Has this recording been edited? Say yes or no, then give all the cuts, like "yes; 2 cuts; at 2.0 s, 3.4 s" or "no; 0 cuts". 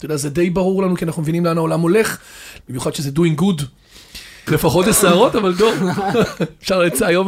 yes; 2 cuts; at 2.6 s, 4.5 s